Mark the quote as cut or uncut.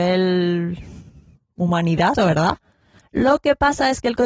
cut